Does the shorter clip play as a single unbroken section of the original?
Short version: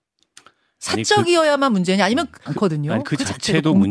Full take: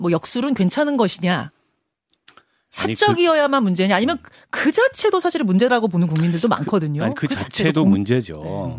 no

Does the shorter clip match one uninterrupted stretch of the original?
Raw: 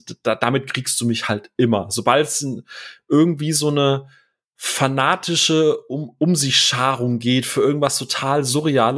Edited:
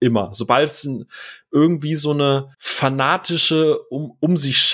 no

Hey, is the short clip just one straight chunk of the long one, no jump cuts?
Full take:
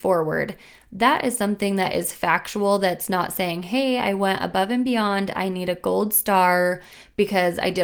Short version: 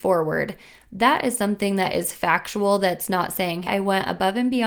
no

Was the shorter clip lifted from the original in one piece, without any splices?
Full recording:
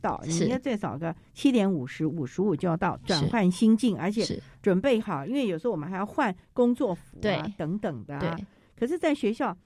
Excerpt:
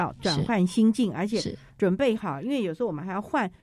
yes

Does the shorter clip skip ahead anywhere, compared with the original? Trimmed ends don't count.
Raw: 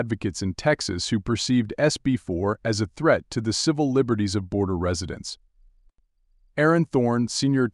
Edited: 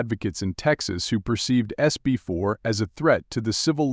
no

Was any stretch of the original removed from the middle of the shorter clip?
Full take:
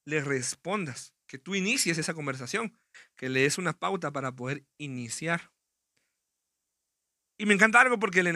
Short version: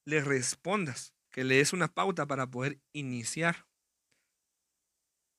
yes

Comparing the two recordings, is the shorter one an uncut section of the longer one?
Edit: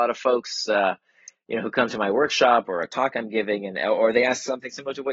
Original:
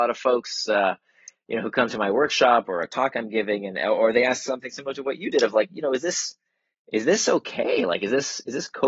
yes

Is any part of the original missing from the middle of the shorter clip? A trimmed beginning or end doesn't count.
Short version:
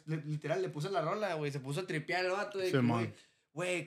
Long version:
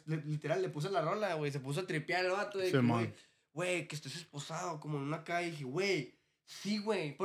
no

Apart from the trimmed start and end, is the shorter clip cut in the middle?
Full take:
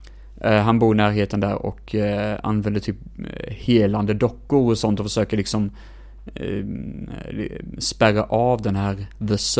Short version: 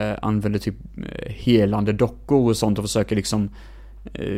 no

